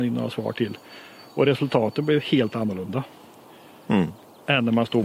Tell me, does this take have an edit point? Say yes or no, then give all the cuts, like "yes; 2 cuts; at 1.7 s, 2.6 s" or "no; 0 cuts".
no; 0 cuts